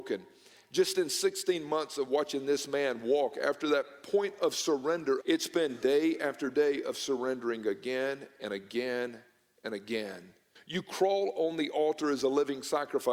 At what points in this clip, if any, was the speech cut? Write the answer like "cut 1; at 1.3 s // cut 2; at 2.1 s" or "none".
cut 1; at 5.2 s // cut 2; at 10.6 s